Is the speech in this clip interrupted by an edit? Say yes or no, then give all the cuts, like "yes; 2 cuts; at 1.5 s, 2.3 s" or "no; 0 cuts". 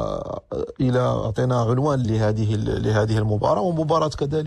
yes; 1 cut; at 2.0 s